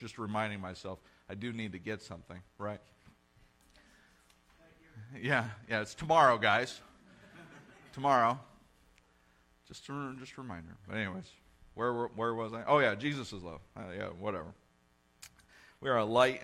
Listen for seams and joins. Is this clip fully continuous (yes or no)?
yes